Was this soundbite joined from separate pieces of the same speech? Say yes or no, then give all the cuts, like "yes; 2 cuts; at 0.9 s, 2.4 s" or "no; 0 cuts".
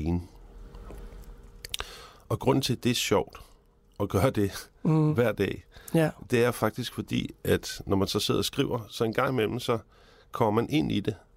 no; 0 cuts